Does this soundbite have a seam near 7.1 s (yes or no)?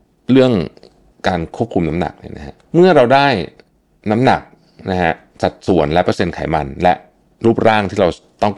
no